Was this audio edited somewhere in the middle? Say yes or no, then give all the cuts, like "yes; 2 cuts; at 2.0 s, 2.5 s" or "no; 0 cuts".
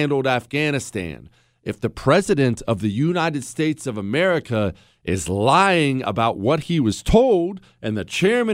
no; 0 cuts